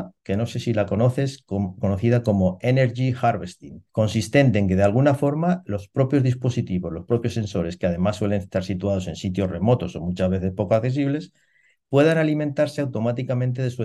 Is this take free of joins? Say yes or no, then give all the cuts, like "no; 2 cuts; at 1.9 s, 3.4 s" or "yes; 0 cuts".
no; 1 cut; at 3.9 s